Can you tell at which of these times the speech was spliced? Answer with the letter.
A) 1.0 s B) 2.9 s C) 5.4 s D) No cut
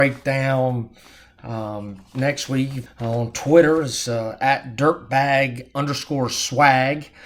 B